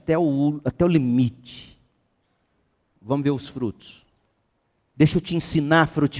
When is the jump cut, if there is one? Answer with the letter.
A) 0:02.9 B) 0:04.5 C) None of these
A